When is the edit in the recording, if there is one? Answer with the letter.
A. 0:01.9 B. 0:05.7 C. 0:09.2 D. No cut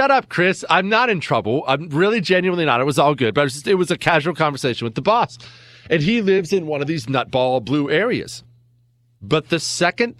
C